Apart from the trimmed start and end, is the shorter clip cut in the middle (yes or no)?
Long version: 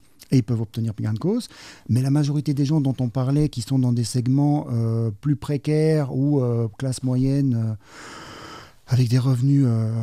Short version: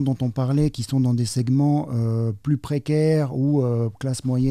no